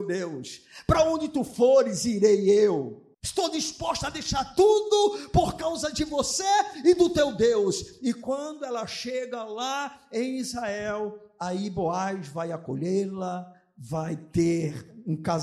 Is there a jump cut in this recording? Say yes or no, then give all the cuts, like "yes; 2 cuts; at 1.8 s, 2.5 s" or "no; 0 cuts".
yes; 1 cut; at 3.1 s